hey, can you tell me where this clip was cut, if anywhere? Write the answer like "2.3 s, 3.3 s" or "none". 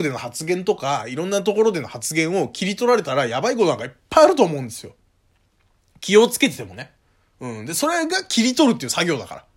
none